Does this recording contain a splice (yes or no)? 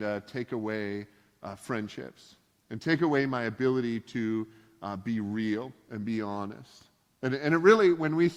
no